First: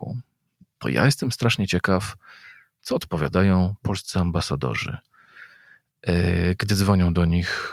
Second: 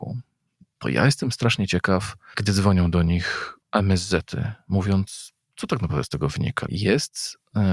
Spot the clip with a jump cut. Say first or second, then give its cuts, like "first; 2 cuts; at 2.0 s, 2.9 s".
second; 3 cuts; at 2.3 s, 3.6 s, 6.7 s